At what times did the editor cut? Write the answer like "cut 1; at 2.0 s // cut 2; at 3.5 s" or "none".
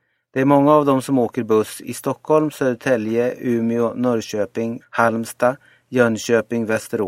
cut 1; at 4.8 s